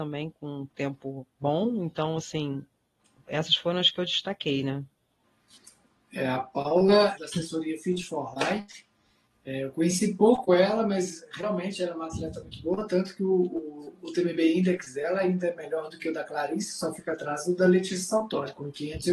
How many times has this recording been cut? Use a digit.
1